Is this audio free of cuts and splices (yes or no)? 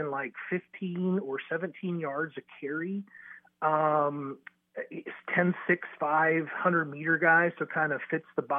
yes